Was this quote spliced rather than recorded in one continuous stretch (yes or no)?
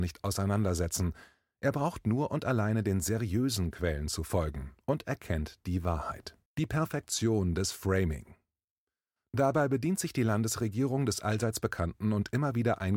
yes